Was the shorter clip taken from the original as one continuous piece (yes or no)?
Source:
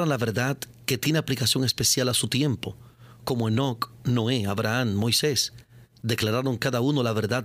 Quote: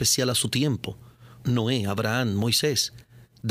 no